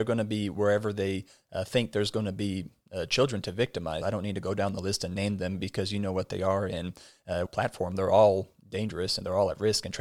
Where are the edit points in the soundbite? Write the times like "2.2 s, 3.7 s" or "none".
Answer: 4.0 s, 7.5 s